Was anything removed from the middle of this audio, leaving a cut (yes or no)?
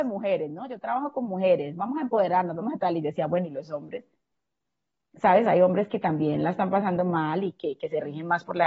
no